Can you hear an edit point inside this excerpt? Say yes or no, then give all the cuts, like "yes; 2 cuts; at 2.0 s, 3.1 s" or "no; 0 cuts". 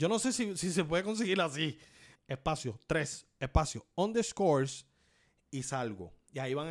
yes; 1 cut; at 2.1 s